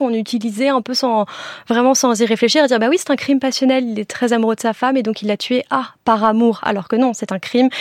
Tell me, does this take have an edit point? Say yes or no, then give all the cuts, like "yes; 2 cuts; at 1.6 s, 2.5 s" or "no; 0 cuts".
no; 0 cuts